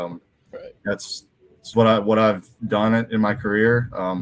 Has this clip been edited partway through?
yes; 1 cut; at 1.7 s

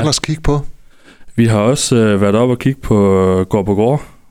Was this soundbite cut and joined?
no; 0 cuts

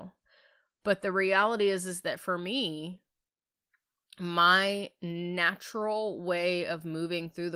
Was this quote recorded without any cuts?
yes; 0 cuts

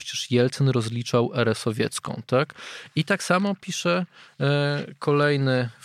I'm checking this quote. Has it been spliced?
no; 0 cuts

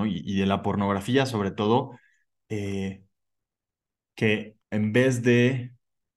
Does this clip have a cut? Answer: yes; 1 cut; at 4.6 s

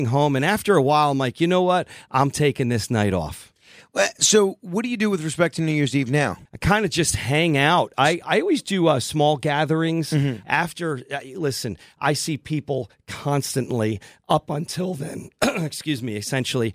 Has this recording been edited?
yes; 2 cuts; at 6.5 s, 10.4 s

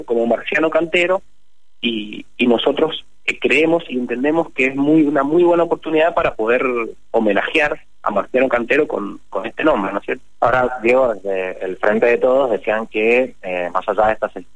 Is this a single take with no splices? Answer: yes; 0 cuts

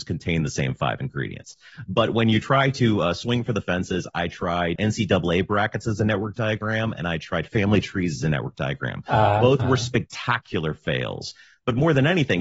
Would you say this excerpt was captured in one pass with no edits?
no; 1 cut; at 4.8 s

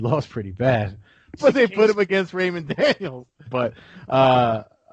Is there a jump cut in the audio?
yes; 2 cuts; at 1.4 s, 3.5 s

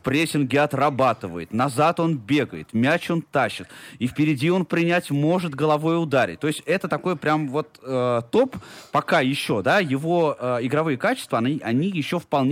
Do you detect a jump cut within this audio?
no; 0 cuts

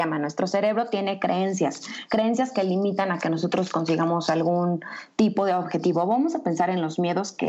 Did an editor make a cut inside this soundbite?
no; 0 cuts

